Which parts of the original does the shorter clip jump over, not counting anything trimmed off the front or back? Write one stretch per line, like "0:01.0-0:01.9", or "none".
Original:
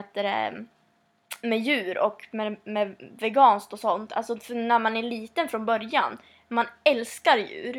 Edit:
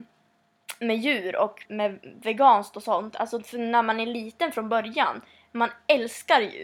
0:02.3-0:02.6